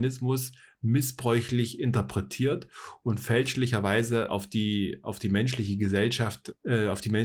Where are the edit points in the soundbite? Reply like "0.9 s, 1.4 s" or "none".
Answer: none